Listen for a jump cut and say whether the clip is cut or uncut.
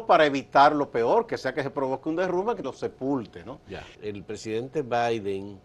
cut